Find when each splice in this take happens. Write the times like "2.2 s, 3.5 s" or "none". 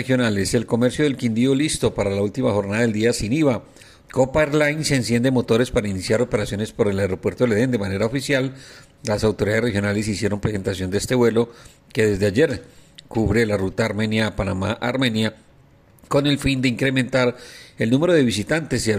4.0 s